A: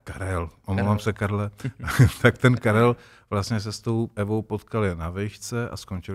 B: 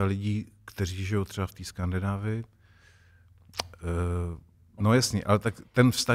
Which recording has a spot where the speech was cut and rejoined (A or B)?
B